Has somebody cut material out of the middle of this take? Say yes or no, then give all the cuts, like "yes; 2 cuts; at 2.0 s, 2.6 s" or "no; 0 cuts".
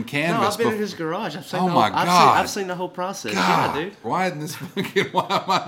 yes; 1 cut; at 4.0 s